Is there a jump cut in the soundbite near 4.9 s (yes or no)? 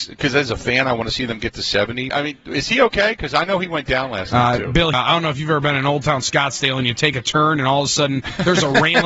yes